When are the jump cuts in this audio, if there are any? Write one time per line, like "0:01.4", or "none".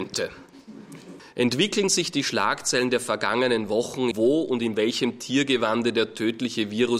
0:01.2
0:04.1